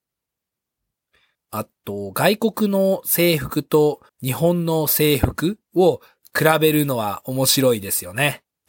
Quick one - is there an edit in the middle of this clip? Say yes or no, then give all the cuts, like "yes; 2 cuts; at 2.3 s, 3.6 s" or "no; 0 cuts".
yes; 2 cuts; at 1.3 s, 4.1 s